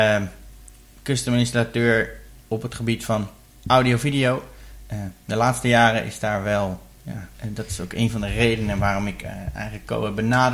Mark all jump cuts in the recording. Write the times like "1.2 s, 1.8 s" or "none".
none

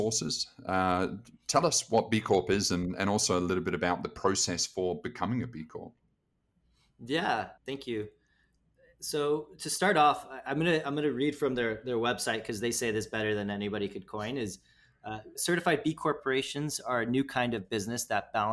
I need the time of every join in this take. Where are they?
7.6 s, 15.4 s

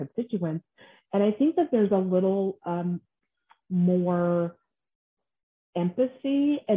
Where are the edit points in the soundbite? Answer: none

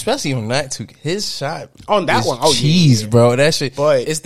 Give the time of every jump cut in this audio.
none

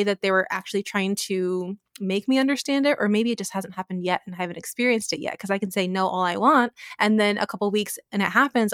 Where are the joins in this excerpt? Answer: none

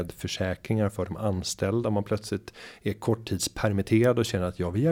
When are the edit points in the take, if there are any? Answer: none

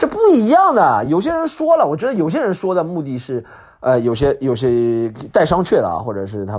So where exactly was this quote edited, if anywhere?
none

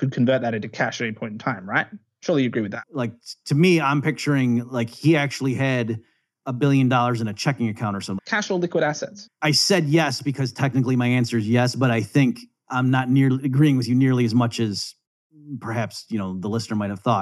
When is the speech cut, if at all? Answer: 2.8 s, 8.2 s, 9.3 s

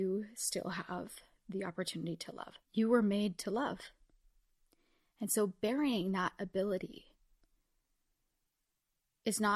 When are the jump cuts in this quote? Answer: 2.6 s

